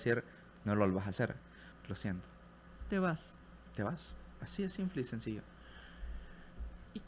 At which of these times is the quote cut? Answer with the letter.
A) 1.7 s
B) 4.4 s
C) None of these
A